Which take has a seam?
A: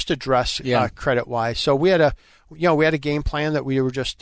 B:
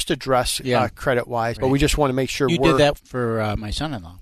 B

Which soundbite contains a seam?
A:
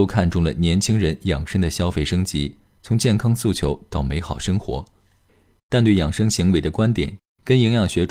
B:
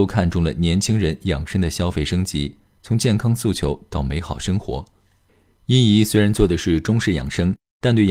A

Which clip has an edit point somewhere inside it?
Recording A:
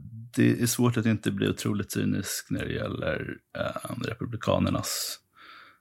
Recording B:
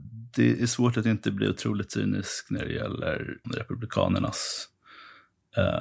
B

